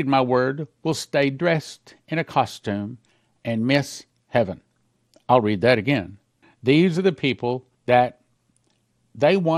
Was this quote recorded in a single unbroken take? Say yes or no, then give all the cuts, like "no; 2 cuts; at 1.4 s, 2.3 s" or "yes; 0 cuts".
no; 2 cuts; at 6.4 s, 7.7 s